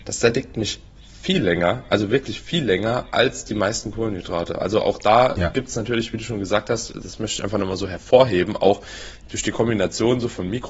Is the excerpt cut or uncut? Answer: uncut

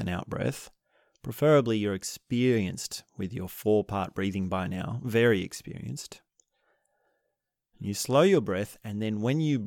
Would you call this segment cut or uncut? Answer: uncut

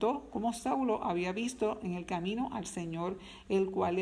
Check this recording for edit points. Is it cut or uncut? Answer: uncut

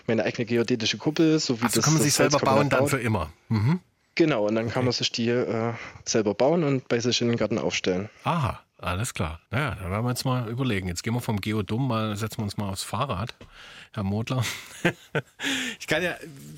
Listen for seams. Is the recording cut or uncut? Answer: cut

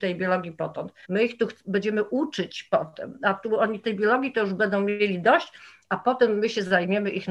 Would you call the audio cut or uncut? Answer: cut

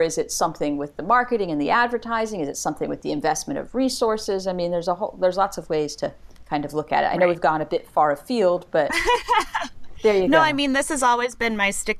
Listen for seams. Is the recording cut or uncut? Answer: uncut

